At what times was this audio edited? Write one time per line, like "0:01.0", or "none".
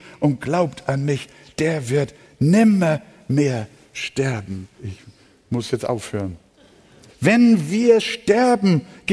0:04.8
0:07.1